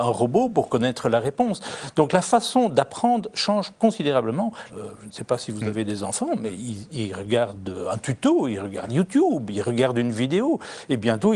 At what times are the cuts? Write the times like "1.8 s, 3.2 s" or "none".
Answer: 4.7 s